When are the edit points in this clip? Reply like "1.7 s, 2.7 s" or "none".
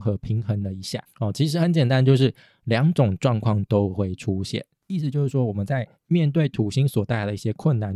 1.1 s, 4.8 s, 5.9 s

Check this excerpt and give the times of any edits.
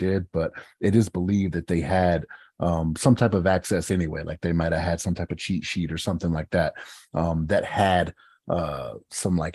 none

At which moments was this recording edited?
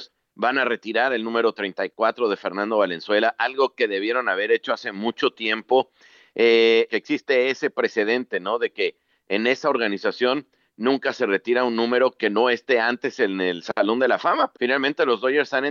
6.9 s, 14.5 s

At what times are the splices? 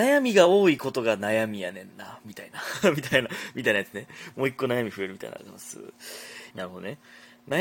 5.4 s, 6.5 s

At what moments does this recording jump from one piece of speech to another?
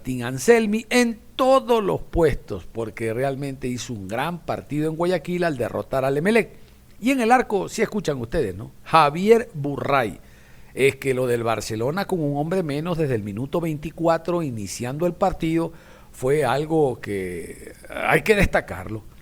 none

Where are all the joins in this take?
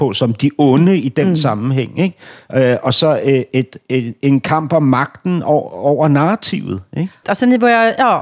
7.2 s

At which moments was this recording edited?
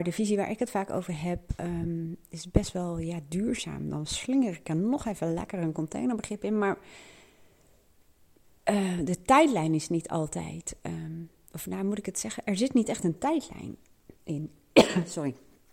none

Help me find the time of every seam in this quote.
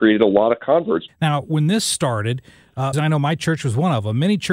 1.1 s, 2.9 s

